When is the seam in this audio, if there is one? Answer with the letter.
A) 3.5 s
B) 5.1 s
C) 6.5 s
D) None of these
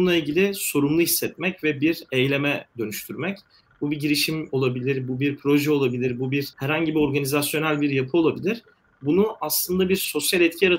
C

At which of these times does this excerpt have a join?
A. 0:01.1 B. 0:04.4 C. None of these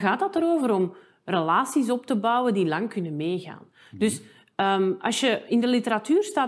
C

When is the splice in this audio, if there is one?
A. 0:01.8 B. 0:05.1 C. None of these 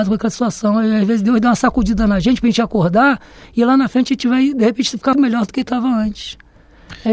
B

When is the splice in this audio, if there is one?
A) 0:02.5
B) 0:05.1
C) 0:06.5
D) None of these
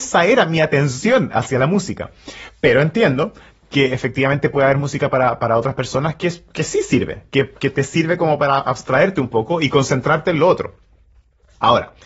D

